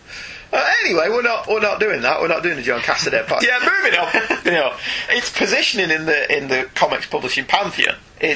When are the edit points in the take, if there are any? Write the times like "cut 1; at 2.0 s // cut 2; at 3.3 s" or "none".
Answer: cut 1; at 3.4 s // cut 2; at 5.1 s